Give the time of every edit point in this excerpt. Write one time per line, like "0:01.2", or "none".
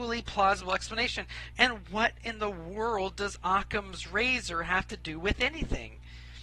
0:01.5